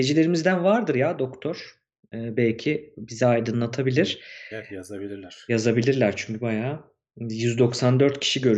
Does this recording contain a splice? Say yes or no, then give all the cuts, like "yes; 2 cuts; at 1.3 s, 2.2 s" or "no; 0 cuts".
no; 0 cuts